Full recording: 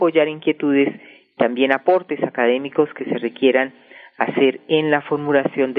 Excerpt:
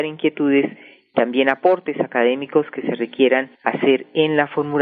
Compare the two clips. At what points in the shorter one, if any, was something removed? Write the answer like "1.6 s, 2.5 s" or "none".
3.5 s